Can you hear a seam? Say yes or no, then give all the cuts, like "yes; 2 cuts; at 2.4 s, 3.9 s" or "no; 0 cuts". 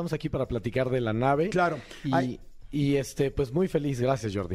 no; 0 cuts